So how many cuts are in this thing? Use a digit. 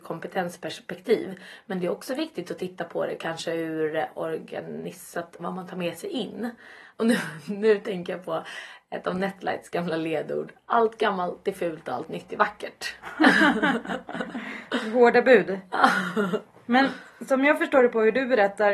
2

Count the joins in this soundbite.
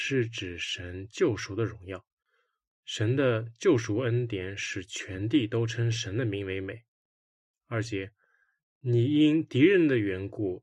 0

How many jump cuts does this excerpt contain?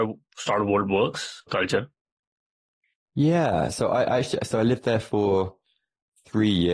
1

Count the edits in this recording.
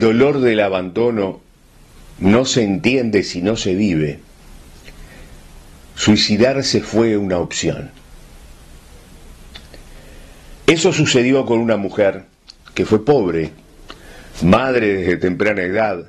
0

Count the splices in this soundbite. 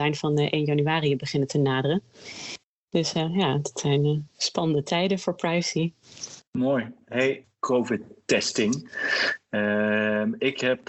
1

